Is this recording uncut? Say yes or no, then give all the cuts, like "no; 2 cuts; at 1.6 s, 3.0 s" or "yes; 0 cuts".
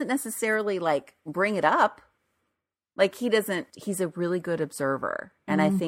no; 1 cut; at 3.7 s